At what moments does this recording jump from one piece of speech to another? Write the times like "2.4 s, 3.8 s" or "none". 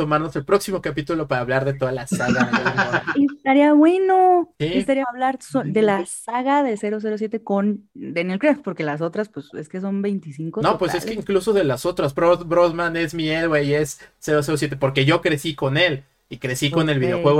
5.0 s, 12.1 s